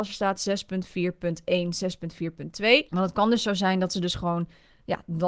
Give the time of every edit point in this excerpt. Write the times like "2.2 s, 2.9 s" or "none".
2.9 s